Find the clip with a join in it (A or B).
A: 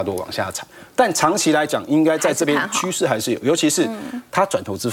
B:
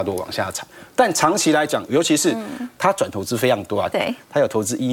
B